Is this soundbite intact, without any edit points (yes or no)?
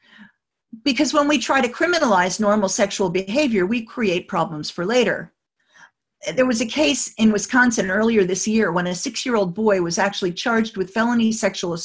yes